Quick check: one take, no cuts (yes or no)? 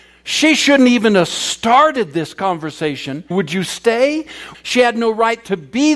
no